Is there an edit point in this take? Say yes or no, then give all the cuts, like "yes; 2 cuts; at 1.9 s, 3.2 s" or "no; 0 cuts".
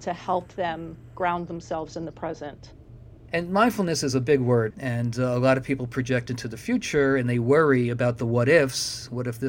yes; 2 cuts; at 3.3 s, 4.7 s